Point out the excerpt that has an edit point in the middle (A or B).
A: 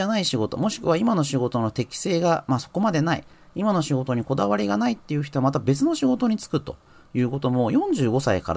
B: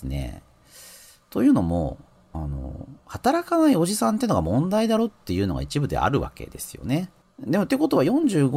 B